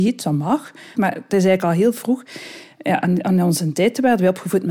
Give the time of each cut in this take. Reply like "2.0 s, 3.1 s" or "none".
0.9 s